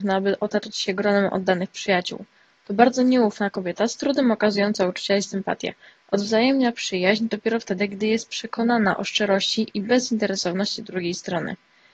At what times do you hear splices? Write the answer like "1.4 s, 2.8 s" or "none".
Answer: none